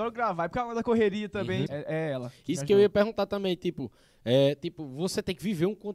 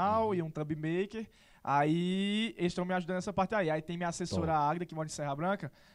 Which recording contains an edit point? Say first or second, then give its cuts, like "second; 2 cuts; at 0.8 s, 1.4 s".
first; 1 cut; at 1.7 s